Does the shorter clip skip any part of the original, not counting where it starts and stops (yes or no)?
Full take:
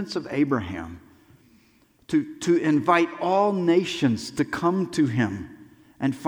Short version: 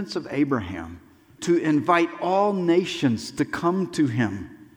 yes